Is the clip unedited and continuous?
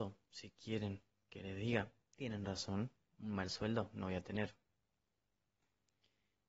yes; 0 cuts

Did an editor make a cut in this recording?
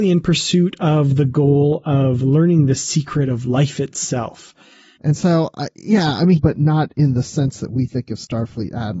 yes; 2 cuts; at 5.0 s, 6.4 s

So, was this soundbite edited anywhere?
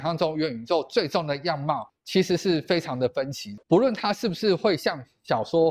no; 0 cuts

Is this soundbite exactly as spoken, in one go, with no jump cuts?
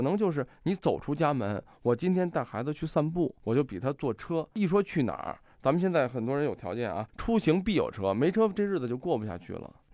yes; 0 cuts

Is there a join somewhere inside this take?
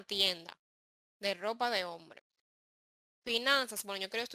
no; 0 cuts

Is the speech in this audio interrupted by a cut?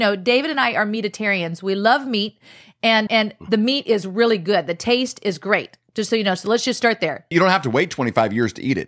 yes; 2 cuts; at 3.1 s, 7.3 s

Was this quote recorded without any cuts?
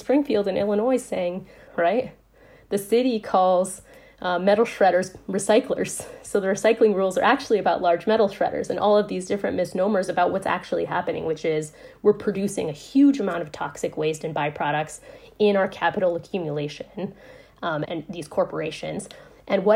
no; 2 cuts; at 1.7 s, 17.9 s

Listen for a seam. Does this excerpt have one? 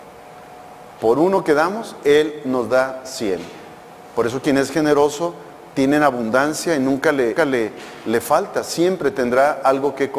yes; 1 cut; at 7.4 s

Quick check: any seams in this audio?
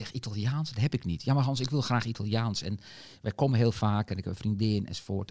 no; 0 cuts

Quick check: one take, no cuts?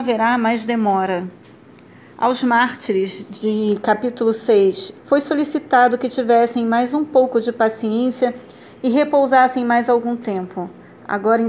no; 1 cut; at 5.0 s

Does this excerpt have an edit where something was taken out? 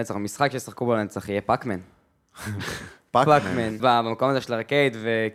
yes; 1 cut; at 3.8 s

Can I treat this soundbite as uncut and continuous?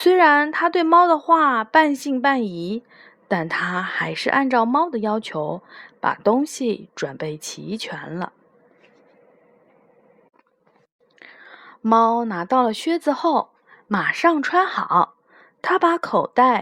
yes; 0 cuts

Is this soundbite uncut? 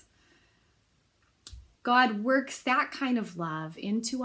no; 1 cut; at 1.8 s

